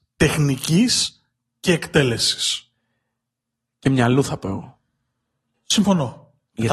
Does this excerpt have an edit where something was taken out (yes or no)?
no